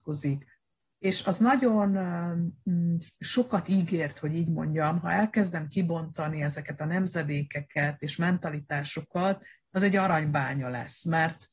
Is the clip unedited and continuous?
no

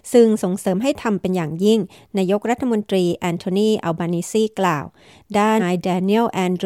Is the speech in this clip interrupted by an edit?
yes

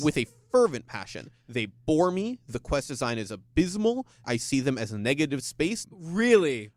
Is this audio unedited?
no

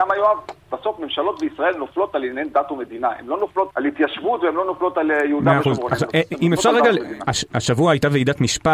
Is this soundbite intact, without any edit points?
no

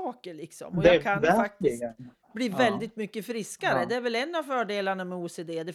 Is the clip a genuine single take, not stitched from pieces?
yes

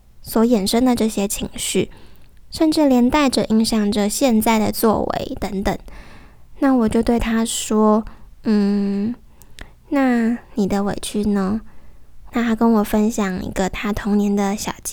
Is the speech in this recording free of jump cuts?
no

